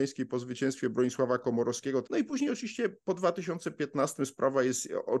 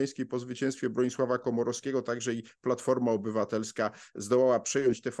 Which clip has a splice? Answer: first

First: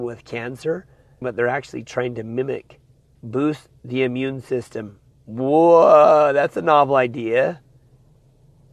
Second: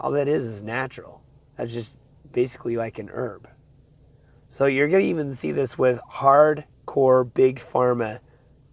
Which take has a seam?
first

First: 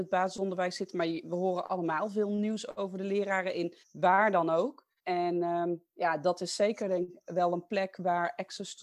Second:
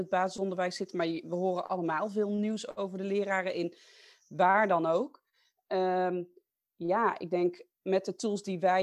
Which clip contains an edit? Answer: first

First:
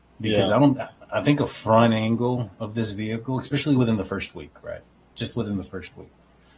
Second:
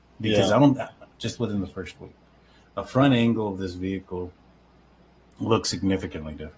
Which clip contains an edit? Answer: second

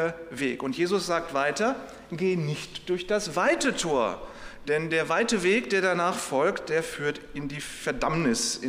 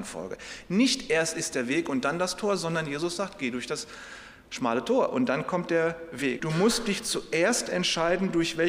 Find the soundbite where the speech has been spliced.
second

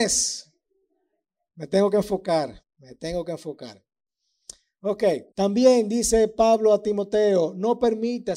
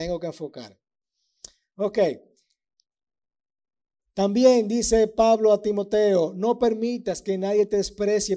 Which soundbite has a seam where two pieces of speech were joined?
first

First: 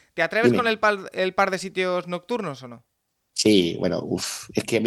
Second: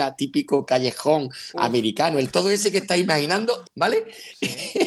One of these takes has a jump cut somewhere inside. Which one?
second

